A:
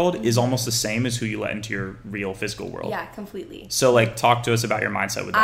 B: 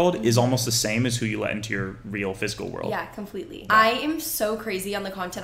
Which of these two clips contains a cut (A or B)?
B